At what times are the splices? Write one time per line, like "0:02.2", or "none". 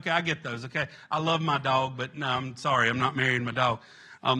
none